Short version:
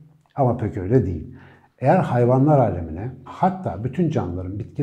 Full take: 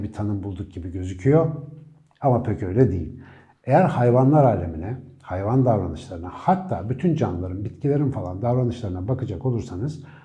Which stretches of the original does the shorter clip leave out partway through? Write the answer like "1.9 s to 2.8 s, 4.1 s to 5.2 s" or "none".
5.1 s to 6.3 s